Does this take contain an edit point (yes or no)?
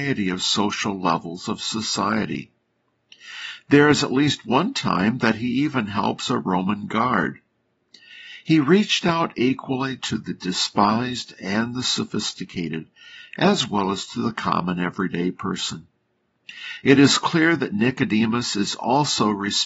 no